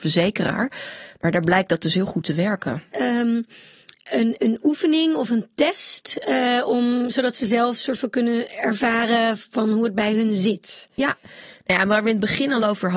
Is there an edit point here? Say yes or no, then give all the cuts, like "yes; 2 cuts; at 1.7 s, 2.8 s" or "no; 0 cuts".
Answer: yes; 2 cuts; at 2.9 s, 4.4 s